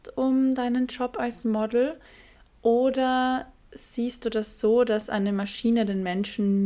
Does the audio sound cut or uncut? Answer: uncut